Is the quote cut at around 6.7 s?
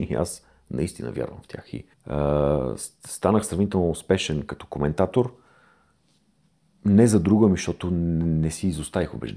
no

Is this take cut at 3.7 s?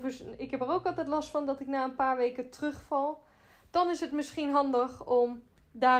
no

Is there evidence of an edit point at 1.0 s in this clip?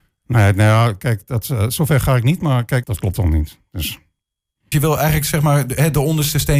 no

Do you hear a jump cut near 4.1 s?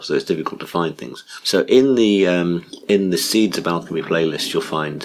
no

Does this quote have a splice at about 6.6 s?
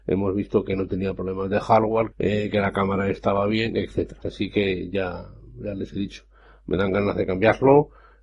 no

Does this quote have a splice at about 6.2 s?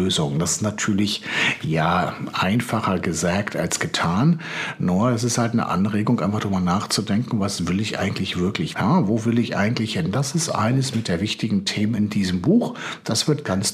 no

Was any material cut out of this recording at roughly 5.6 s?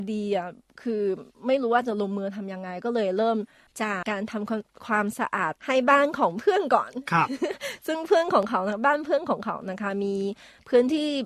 yes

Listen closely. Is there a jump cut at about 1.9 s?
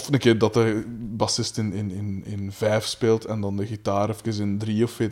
no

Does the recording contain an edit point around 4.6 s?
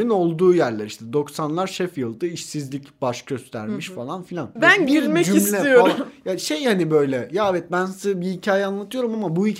yes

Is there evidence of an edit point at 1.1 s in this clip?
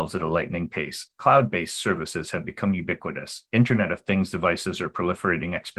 no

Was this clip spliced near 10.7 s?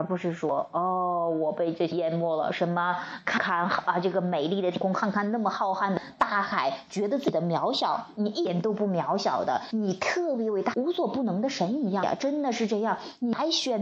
yes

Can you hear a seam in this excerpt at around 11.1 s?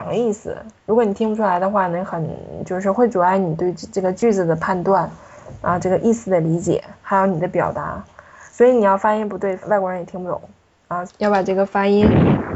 yes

